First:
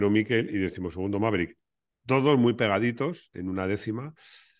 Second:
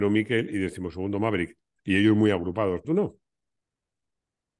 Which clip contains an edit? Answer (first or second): second